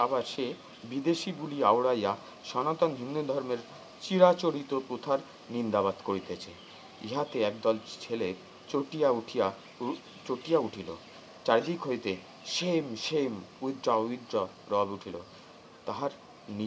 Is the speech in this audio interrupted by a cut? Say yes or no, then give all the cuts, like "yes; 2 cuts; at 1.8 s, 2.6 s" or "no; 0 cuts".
no; 0 cuts